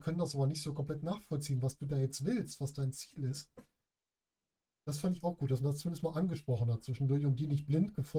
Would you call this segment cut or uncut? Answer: uncut